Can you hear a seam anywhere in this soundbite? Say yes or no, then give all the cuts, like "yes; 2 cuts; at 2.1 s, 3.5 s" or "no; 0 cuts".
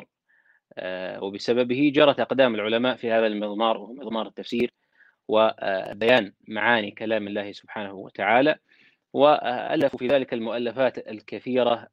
no; 0 cuts